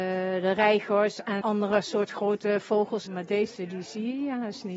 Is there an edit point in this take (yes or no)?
yes